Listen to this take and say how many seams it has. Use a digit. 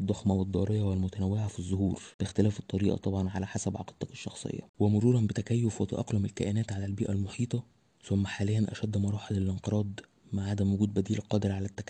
0